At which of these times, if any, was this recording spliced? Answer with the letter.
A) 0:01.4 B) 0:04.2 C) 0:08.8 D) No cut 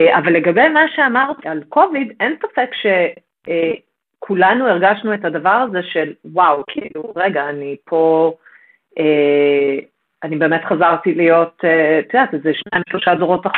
A